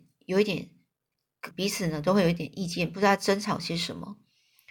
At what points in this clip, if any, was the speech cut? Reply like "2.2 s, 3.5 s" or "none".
1.5 s

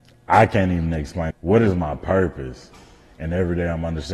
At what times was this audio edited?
1.3 s

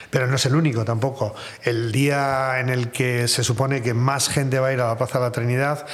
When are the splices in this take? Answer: none

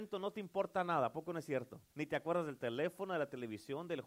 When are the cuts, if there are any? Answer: 1.9 s

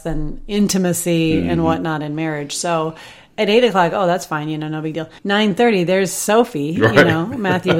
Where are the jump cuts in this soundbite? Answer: 5.2 s

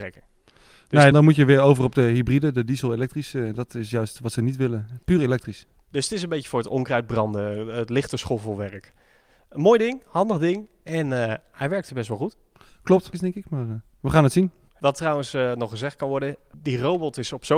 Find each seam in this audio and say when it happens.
1.1 s, 13.1 s, 14.7 s

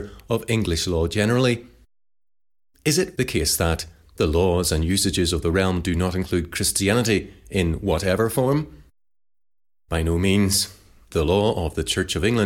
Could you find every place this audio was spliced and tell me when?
3.2 s

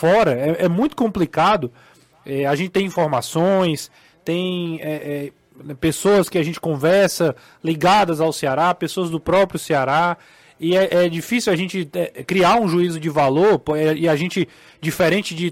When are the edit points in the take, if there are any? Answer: none

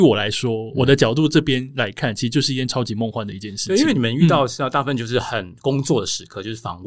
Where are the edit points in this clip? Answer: none

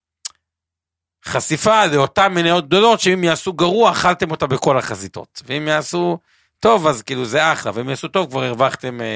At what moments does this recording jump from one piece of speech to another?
none

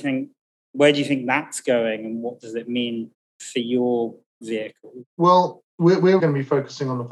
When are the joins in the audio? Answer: 5.1 s, 6.2 s

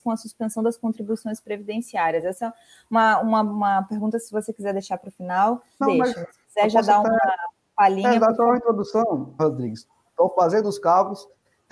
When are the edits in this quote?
5.8 s, 9.4 s

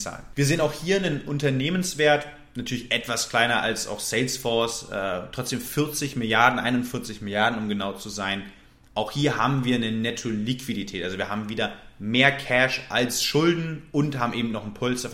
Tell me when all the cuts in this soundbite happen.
none

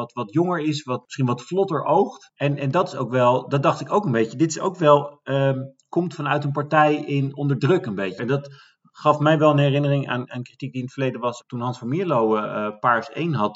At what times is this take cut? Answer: 8.2 s, 11.4 s

